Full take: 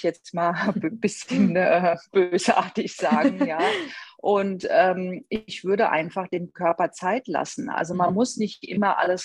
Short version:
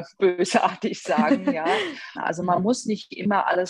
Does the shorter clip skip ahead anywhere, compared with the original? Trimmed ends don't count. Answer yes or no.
yes